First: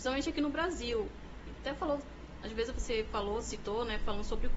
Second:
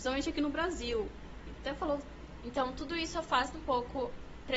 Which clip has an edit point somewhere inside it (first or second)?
second